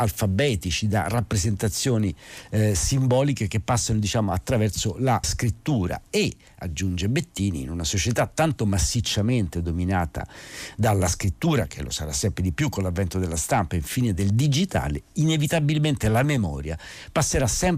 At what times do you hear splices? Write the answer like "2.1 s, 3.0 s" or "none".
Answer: 5.2 s